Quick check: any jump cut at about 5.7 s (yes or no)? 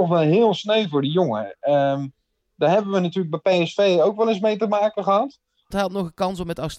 yes